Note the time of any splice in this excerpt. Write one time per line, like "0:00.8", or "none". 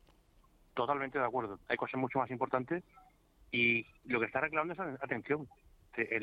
0:01.6